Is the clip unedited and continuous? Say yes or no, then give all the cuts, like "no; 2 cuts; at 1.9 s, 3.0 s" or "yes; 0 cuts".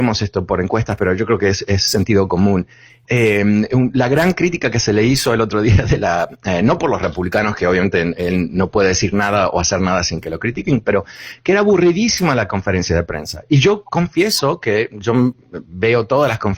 no; 1 cut; at 3.0 s